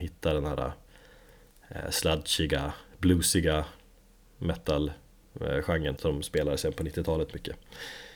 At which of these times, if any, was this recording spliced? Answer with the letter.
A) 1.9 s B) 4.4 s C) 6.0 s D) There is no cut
C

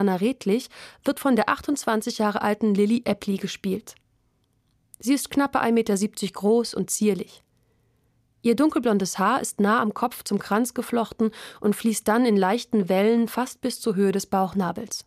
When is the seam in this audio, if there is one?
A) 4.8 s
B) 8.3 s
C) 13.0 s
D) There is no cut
D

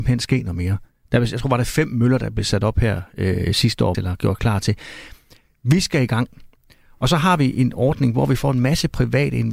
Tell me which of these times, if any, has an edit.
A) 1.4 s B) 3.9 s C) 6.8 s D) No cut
B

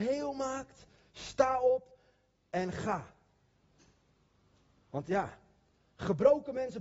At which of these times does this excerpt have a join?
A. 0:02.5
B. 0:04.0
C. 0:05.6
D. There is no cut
D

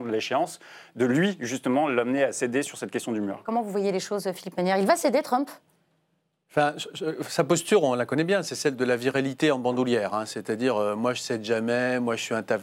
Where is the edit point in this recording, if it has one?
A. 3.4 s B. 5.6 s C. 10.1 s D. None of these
D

